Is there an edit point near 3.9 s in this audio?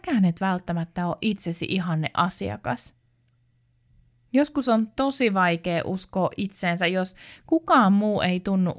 no; 0 cuts

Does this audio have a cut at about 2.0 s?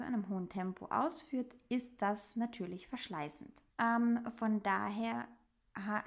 no; 1 cut; at 3.7 s

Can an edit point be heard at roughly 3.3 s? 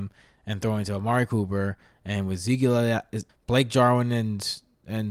yes; 1 cut; at 3.3 s

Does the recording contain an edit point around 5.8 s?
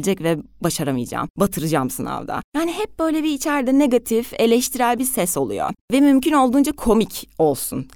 yes; 1 cut; at 5.8 s

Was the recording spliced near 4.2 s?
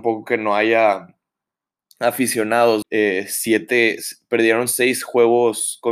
no; 1 cut; at 2.8 s

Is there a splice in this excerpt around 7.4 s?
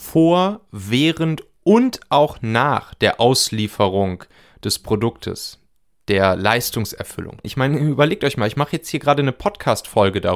yes; 1 cut; at 7.4 s

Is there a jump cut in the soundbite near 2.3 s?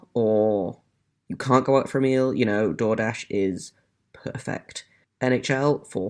no; 1 cut; at 5.0 s

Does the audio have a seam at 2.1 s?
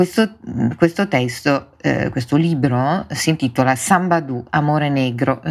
no; 0 cuts

